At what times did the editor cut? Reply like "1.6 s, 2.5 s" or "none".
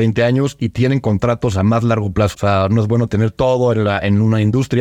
2.3 s